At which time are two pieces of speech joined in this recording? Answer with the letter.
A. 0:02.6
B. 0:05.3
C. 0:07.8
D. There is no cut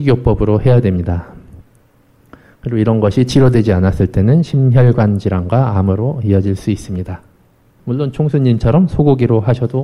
C